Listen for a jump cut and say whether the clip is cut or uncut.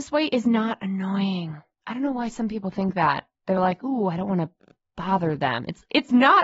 uncut